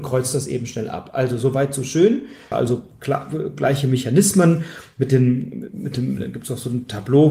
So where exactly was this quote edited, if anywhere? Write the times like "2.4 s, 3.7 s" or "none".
2.5 s